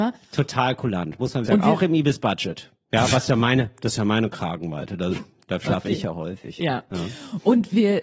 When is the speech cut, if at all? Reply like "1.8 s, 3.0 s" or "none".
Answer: 1.5 s